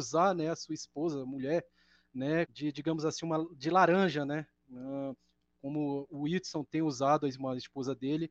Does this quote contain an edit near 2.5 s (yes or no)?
yes